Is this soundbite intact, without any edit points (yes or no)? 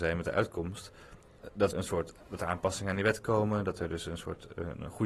no